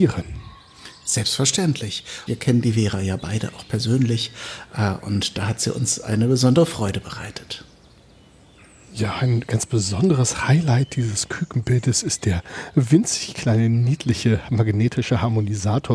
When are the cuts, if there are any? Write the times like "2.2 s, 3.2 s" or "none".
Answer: 2.3 s